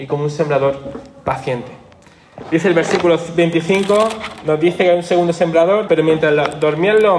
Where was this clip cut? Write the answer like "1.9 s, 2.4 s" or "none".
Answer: 2.4 s, 5.9 s